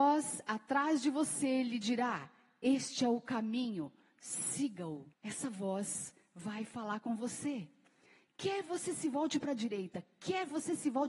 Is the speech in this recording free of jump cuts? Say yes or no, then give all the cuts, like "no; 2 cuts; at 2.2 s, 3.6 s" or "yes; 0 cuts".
no; 1 cut; at 5.1 s